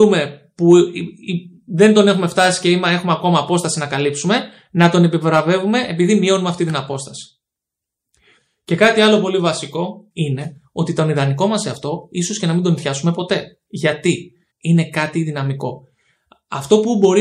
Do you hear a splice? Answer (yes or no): yes